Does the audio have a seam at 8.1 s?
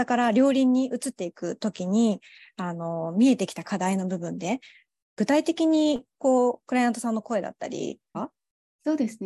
yes; 1 cut; at 8.1 s

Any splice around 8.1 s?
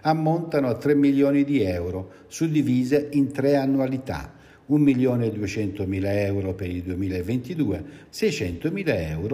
yes; 1 cut; at 8.1 s

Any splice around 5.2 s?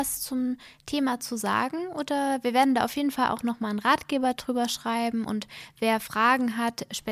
no; 0 cuts

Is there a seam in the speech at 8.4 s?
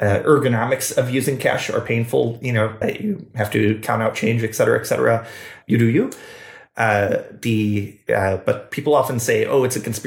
no; 2 cuts; at 2.8 s, 5.6 s

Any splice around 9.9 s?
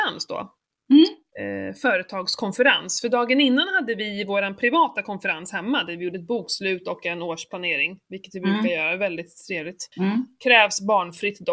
yes; 1 cut; at 9.9 s

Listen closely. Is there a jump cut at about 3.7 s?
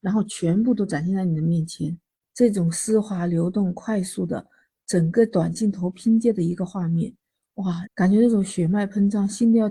no; 2 cuts; at 2.2 s, 7.8 s

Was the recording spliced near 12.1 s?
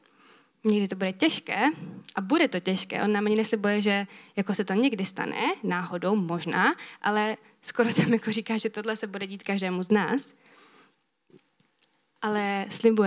no; 0 cuts

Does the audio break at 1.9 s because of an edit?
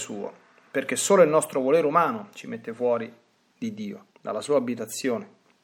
no; 1 cut; at 4.1 s

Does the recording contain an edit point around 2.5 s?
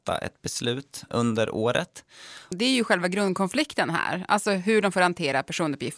yes; 2 cuts; at 1.1 s, 2.5 s

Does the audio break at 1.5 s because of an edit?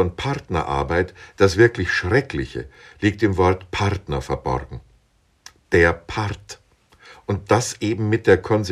no; 1 cut; at 5.6 s

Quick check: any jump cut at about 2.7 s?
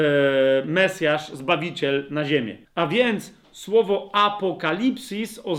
yes; 1 cut; at 2.7 s

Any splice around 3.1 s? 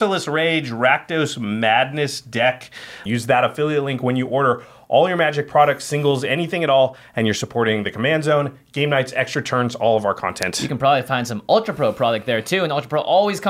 yes; 1 cut; at 3.1 s

